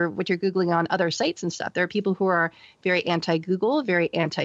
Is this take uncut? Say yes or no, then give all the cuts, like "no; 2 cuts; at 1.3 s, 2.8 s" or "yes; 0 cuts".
yes; 0 cuts